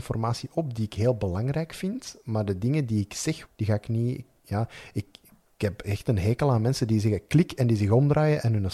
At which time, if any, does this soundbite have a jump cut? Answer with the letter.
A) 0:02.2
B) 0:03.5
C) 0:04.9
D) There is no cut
B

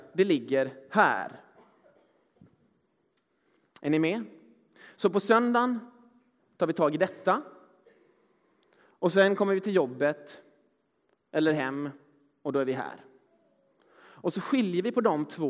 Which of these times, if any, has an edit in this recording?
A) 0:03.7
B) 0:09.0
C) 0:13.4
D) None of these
D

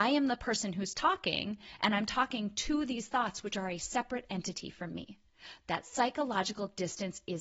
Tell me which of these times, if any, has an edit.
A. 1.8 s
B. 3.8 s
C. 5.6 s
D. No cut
D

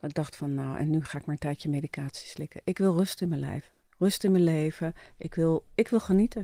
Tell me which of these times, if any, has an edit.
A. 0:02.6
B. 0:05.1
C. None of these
C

